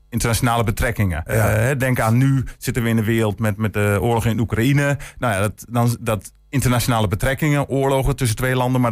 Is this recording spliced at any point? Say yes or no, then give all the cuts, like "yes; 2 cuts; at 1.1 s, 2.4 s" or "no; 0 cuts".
yes; 1 cut; at 1.3 s